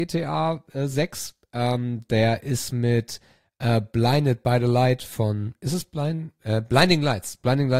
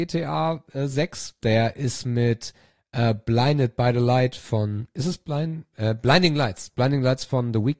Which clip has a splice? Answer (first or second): second